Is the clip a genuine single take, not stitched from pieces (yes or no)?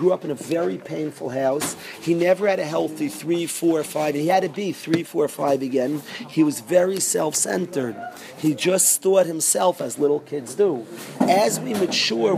yes